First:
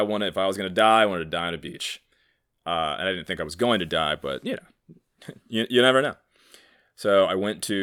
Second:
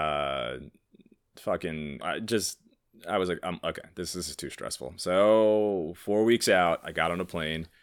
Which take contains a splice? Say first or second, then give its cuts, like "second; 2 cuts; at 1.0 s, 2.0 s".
second; 1 cut; at 2.0 s